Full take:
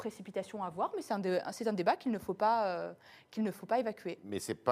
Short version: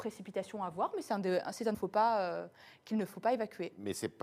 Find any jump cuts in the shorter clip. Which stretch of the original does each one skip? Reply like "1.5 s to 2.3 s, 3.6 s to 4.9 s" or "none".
1.7 s to 2.2 s